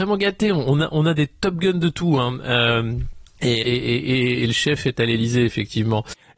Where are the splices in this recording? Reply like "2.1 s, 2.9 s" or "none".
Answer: 3.6 s